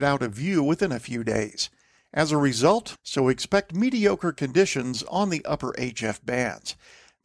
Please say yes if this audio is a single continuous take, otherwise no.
no